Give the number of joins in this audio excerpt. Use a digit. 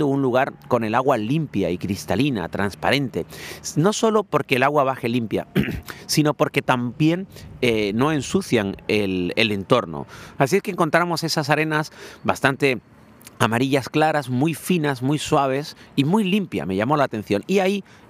1